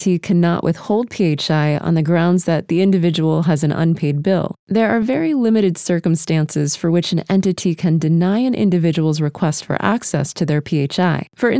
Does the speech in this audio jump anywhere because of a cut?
no; 0 cuts

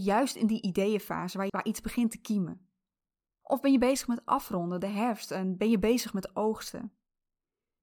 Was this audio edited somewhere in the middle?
yes; 2 cuts; at 1.5 s, 3.3 s

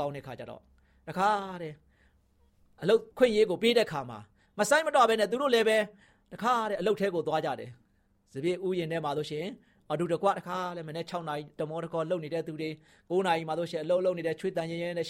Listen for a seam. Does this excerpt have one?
yes; 1 cut; at 3.1 s

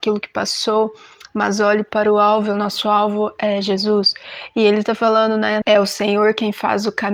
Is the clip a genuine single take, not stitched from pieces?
no; 1 cut; at 5.6 s

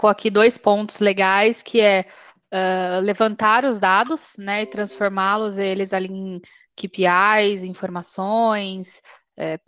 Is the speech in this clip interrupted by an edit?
no; 0 cuts

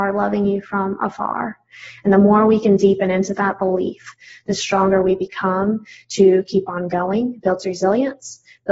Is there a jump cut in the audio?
no; 0 cuts

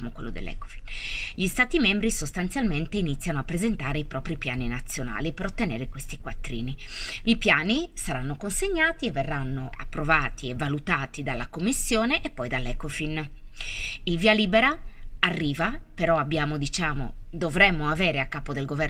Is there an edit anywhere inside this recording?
yes; 1 cut; at 7.2 s

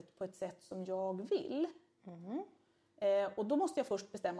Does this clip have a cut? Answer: no; 0 cuts

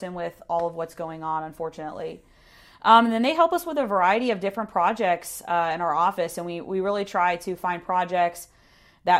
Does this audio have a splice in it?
no; 0 cuts

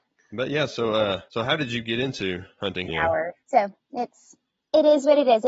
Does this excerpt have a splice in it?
yes; 2 cuts; at 1.3 s, 2.9 s

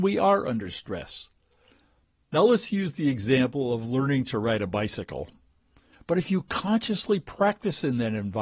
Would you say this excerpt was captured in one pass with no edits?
no; 1 cut; at 5.9 s

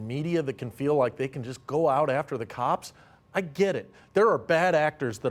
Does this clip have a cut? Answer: no; 0 cuts

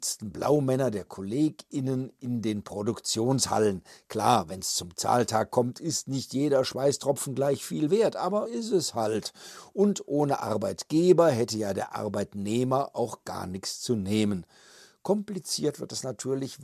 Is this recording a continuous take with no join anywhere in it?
no; 1 cut; at 8.5 s

